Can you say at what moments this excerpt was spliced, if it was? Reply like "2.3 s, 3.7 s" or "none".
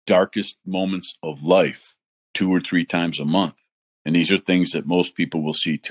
4.0 s